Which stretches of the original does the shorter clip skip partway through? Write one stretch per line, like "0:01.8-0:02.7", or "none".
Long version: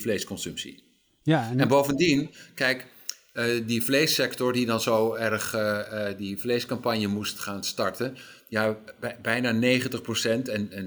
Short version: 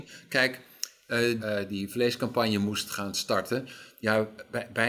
0:03.7-0:05.9

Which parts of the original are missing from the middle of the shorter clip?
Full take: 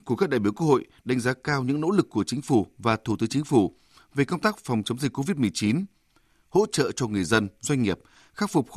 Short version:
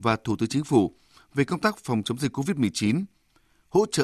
none

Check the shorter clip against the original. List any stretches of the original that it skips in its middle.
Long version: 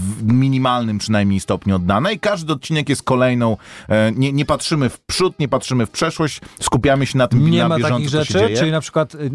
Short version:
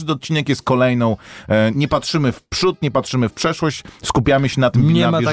0:04.1-0:04.3

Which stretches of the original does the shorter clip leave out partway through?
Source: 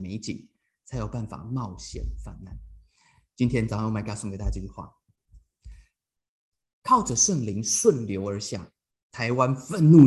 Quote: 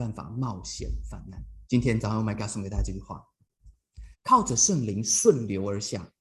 0:02.8-0:03.3
0:05.8-0:06.7

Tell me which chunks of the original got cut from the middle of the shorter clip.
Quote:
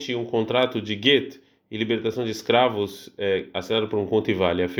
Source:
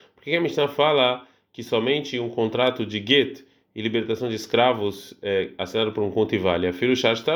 none

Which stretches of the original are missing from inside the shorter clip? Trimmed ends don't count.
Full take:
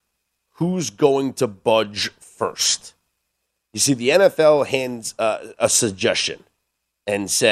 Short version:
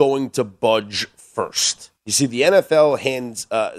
0:03.0-0:03.6

